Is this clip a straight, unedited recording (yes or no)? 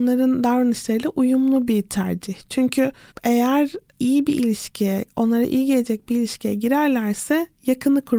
yes